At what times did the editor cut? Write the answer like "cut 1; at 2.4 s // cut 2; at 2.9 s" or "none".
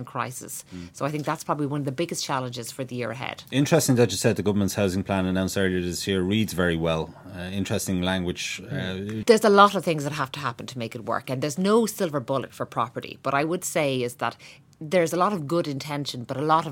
cut 1; at 9.2 s

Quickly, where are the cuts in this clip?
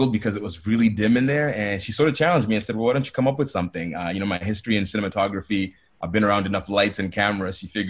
none

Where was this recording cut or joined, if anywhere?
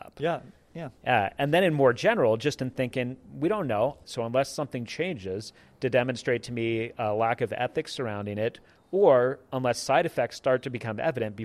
cut 1; at 4.0 s

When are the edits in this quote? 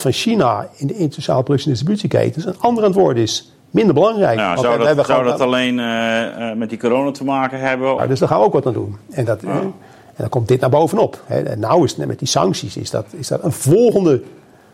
cut 1; at 8.0 s

